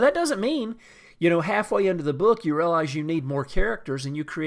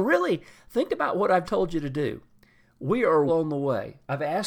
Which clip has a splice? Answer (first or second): second